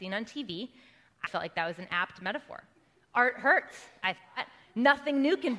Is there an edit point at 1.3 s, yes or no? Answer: yes